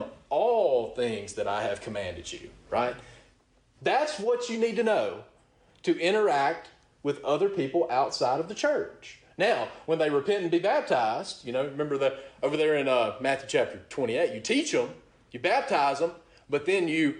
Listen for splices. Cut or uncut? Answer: cut